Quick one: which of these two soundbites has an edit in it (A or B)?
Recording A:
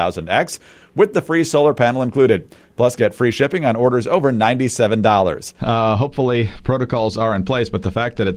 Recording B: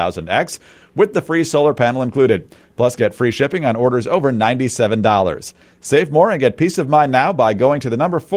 A